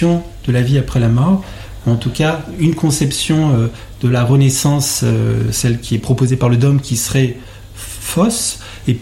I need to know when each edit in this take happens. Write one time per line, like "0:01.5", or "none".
none